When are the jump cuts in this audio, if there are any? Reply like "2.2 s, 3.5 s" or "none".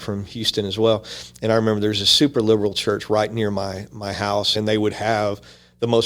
4.5 s